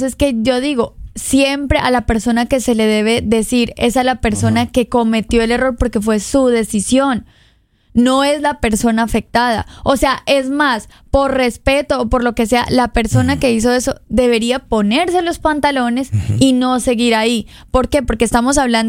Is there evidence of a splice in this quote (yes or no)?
no